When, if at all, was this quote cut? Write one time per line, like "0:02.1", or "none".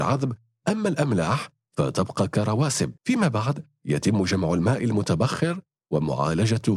0:03.0